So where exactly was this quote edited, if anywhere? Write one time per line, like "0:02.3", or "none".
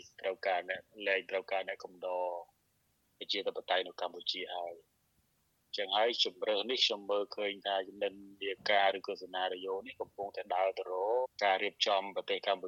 0:11.2